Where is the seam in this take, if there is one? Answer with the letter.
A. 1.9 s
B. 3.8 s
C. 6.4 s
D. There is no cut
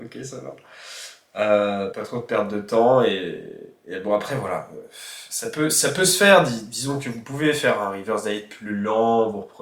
A